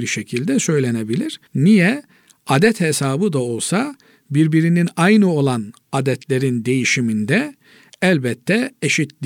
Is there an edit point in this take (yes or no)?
yes